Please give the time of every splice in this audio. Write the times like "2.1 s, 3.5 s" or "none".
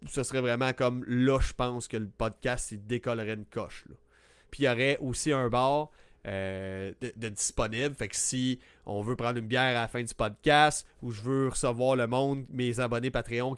4.4 s